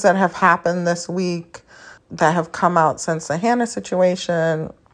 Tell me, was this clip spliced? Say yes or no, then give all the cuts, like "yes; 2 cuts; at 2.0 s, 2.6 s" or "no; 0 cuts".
yes; 1 cut; at 2.0 s